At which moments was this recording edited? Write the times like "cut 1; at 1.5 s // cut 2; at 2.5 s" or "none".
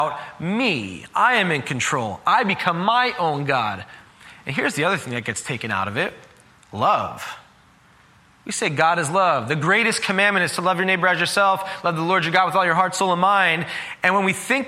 none